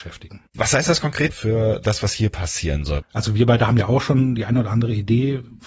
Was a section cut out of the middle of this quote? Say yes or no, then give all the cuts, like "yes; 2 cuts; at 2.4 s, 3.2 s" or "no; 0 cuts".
yes; 2 cuts; at 1.3 s, 3.0 s